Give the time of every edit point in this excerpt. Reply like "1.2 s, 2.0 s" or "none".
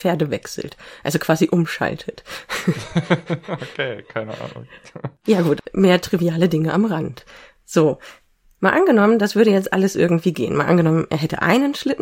none